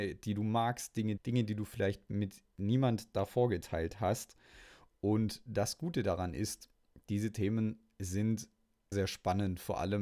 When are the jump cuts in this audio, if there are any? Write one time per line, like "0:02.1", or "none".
0:01.2
0:08.9